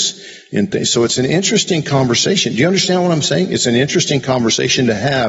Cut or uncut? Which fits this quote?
uncut